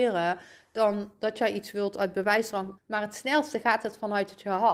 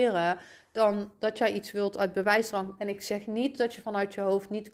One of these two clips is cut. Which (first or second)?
first